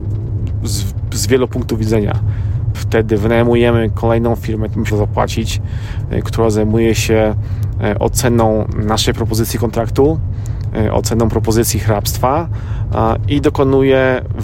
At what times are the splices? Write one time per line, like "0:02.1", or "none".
0:02.7
0:04.9

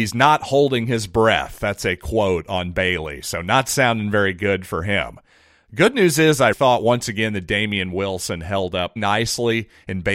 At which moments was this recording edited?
0:06.5
0:09.0

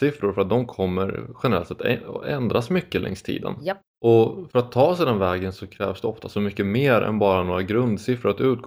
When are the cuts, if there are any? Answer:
0:03.9

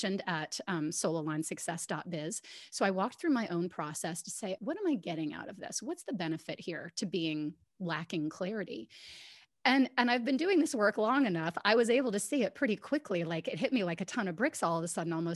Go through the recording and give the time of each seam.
0:04.6

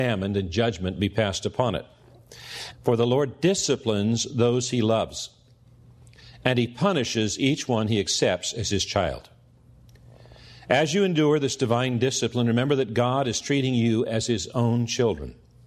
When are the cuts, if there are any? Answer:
0:02.7

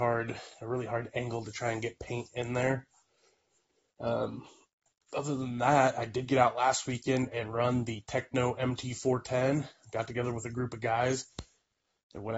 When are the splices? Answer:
none

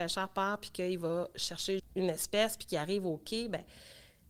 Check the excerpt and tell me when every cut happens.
0:01.8

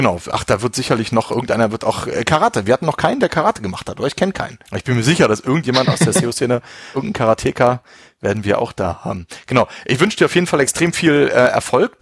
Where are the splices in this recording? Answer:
0:04.7

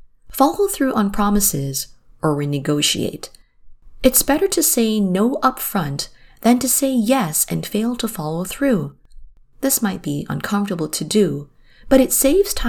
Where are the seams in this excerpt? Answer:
none

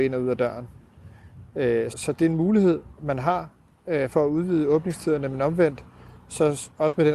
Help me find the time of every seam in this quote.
0:01.9

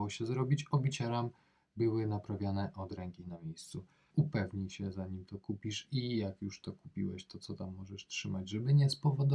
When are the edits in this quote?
0:04.1

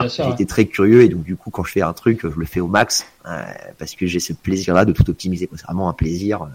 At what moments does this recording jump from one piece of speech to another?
none

